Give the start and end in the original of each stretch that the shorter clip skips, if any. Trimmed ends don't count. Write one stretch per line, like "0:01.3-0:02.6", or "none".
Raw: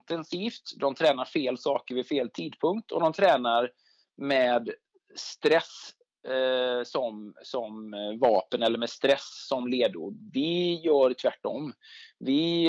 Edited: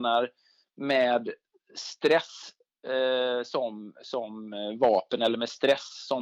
none